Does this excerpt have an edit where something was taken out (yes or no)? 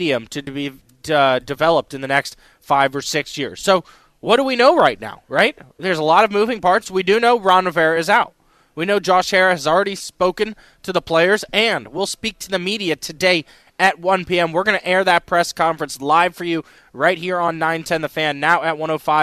no